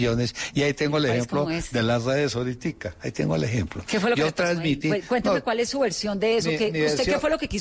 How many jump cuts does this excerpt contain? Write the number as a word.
zero